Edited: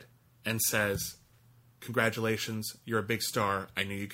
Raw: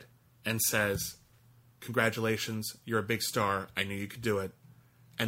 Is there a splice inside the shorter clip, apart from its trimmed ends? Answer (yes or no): no